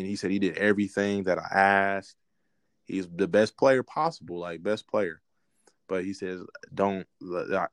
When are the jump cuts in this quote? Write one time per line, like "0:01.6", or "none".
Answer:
0:06.7